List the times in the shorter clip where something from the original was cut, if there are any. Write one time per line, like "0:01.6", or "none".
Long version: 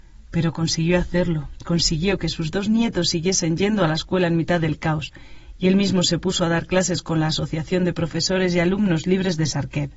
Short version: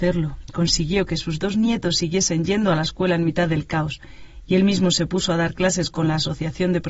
none